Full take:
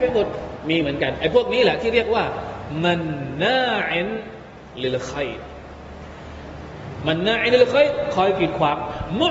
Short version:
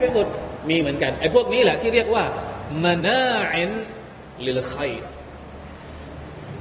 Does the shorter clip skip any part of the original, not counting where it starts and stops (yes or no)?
yes